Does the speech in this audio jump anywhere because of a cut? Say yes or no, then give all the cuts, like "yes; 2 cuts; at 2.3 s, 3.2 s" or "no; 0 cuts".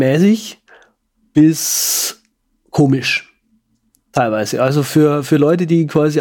no; 0 cuts